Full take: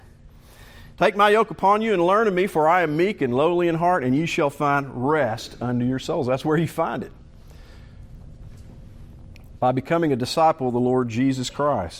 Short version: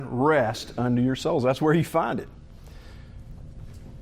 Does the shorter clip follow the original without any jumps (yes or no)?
yes